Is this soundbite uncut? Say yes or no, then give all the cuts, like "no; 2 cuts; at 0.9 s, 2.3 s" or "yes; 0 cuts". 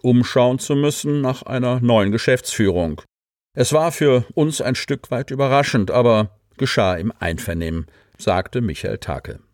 yes; 0 cuts